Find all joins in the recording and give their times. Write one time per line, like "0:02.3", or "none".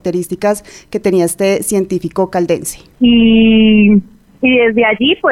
0:02.9